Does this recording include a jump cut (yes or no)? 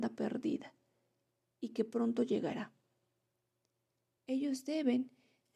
yes